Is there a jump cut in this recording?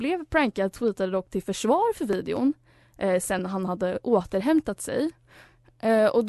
no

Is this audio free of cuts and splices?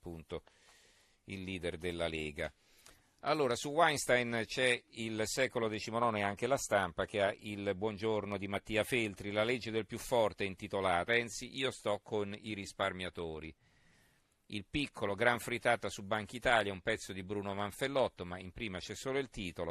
no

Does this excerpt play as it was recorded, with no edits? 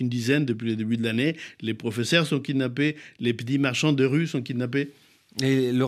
yes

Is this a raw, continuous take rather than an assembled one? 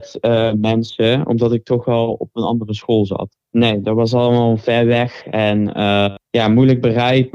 no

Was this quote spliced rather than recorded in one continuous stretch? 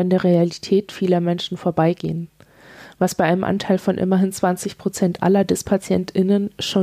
no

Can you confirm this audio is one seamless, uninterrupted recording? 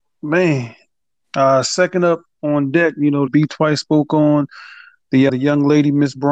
no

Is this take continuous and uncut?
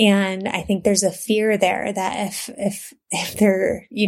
yes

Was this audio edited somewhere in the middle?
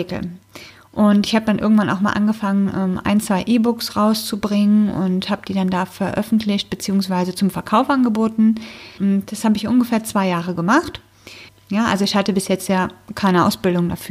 yes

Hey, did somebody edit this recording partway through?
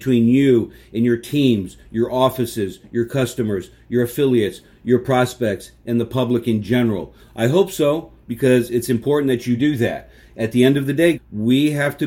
yes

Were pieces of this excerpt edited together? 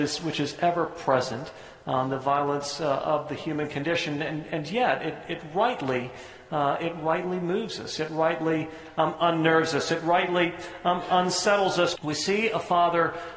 yes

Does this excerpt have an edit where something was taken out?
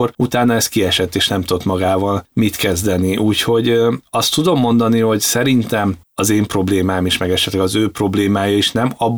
no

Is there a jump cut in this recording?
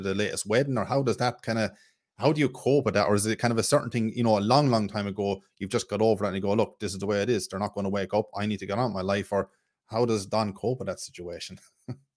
no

